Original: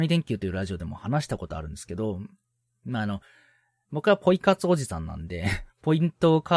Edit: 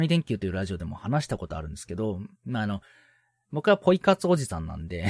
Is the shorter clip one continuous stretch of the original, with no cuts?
no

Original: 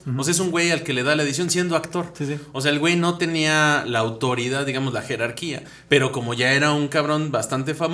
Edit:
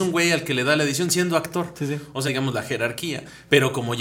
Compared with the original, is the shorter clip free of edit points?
no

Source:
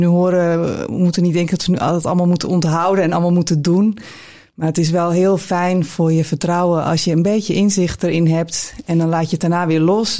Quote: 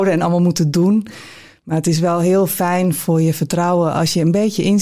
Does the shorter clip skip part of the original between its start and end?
no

